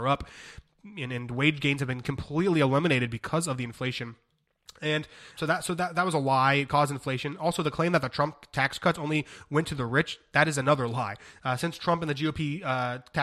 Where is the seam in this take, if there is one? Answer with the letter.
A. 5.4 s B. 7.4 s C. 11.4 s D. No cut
A